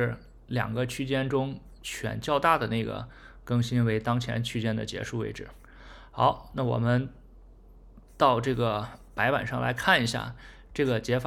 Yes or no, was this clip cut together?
no